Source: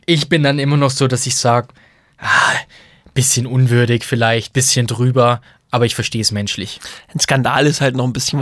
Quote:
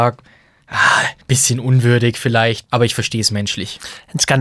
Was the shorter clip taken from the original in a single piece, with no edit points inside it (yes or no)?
no